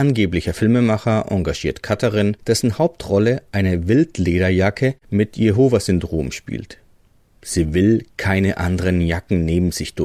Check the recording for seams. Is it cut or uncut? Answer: cut